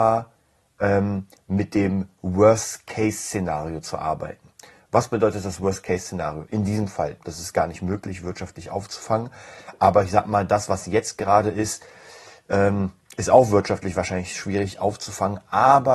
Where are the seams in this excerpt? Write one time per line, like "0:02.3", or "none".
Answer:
0:07.2